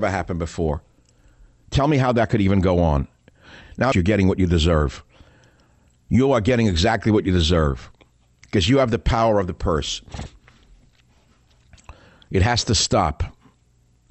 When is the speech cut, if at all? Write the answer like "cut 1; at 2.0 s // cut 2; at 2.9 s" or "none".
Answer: cut 1; at 3.9 s